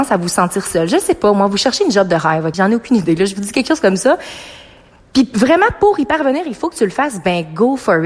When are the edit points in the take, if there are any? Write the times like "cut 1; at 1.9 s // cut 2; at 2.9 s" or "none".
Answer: cut 1; at 2.5 s